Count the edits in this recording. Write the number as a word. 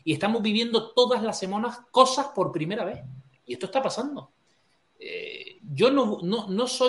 zero